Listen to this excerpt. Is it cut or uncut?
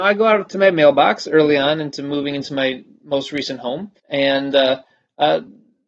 cut